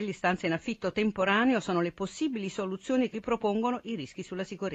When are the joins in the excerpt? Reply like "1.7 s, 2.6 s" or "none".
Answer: 3.1 s